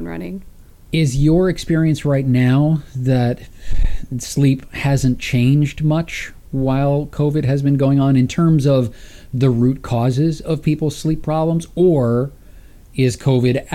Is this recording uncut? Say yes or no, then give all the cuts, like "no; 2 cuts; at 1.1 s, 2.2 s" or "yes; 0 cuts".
yes; 0 cuts